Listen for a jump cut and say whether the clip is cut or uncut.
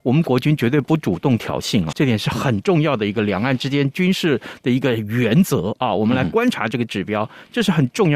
cut